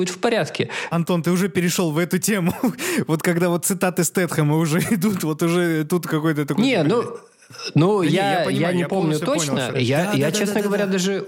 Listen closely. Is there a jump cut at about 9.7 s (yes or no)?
yes